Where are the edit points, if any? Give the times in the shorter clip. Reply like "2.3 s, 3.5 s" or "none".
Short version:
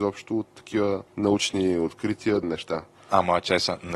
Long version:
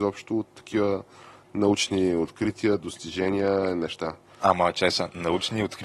1.1 s, 2.4 s